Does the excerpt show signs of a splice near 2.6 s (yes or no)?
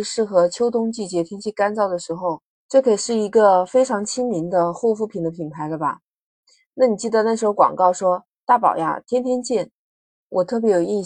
yes